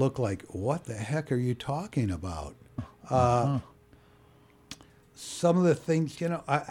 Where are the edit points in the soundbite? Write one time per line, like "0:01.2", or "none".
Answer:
0:02.8